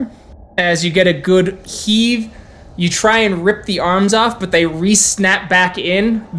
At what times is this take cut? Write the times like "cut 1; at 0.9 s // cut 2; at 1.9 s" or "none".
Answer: none

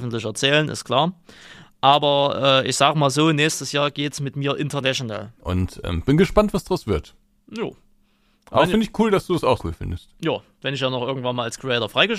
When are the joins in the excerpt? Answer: cut 1; at 5.4 s // cut 2; at 9.6 s

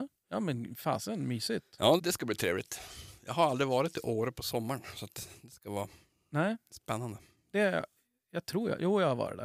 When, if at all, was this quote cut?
cut 1; at 2.0 s

